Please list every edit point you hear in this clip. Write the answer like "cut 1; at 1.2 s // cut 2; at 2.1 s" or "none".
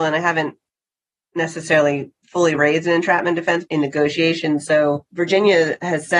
cut 1; at 3.6 s